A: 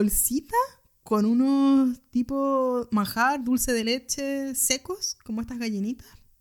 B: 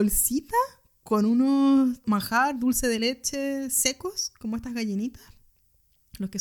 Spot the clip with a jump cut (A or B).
B